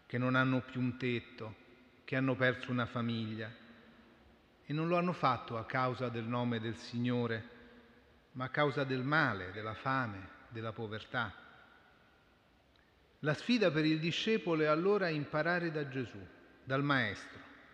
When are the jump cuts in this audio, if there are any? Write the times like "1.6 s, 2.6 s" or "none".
9.5 s